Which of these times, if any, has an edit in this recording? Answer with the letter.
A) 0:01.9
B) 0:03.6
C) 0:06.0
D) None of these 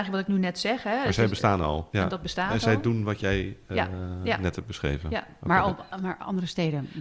A